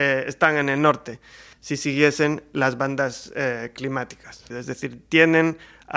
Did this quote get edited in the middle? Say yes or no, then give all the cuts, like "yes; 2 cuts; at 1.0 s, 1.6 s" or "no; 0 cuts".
yes; 2 cuts; at 1.5 s, 4.5 s